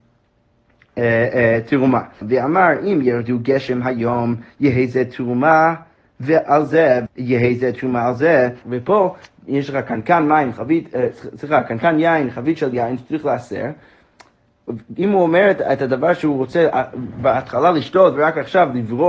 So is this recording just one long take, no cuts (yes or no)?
no